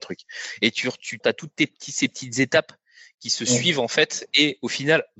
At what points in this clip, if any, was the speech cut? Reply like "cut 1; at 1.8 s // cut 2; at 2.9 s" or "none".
cut 1; at 1.2 s